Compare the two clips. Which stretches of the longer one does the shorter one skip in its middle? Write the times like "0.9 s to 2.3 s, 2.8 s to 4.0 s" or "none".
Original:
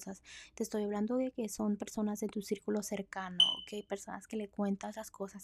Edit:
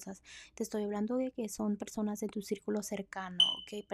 none